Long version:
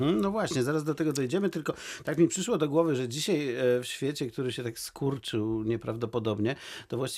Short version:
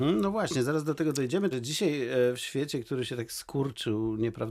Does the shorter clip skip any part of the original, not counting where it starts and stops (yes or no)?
yes